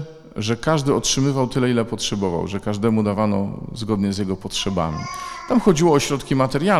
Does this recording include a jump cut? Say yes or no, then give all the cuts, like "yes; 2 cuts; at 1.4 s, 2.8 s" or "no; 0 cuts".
no; 0 cuts